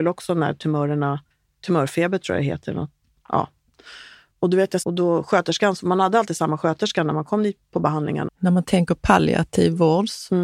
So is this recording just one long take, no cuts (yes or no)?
no